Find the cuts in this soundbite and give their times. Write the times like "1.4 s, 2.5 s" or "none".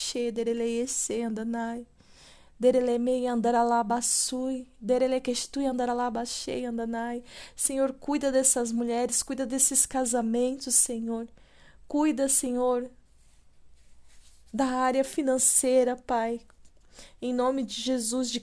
none